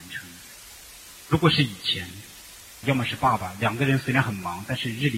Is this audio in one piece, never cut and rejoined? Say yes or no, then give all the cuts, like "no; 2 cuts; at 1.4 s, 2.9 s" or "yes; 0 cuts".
no; 1 cut; at 2.8 s